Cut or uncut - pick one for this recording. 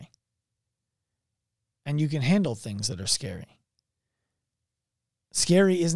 uncut